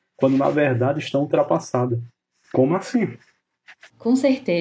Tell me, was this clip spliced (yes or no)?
yes